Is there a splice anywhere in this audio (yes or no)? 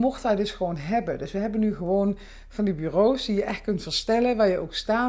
no